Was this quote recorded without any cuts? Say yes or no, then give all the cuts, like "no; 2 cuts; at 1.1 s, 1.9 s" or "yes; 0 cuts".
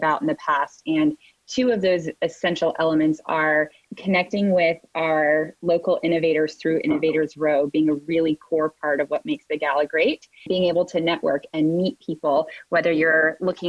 no; 1 cut; at 10.5 s